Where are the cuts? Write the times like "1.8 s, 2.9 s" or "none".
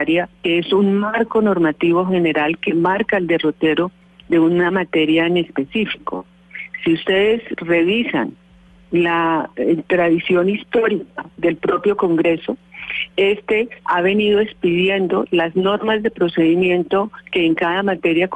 13.8 s